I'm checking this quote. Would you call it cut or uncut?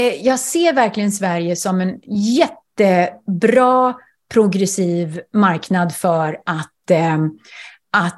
uncut